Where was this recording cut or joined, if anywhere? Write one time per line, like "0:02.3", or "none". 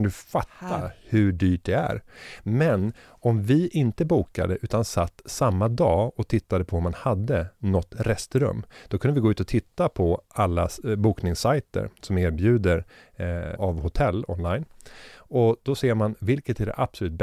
0:13.6

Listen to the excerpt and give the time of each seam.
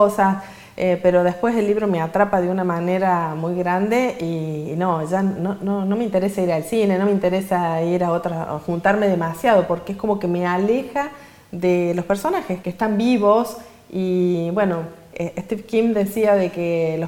0:12.6

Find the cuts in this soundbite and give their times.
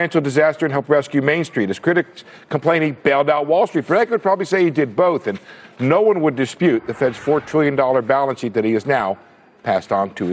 none

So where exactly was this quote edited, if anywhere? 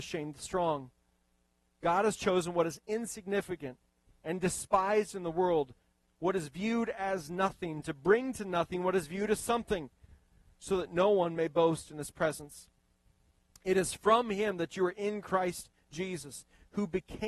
none

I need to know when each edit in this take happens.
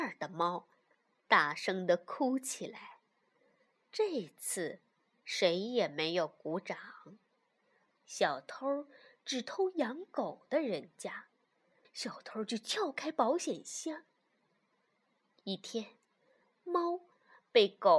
0:07.9
0:11.8

